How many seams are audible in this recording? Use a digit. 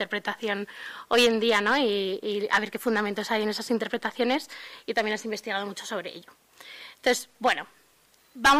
0